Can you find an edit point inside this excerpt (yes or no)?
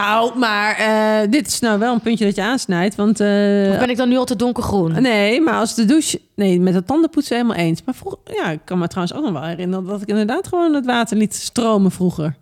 no